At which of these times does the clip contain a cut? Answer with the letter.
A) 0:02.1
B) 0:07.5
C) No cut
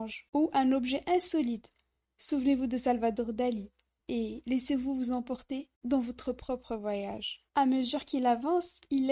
B